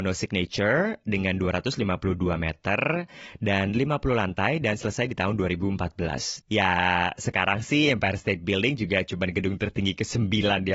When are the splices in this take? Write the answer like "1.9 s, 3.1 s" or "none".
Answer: 6.4 s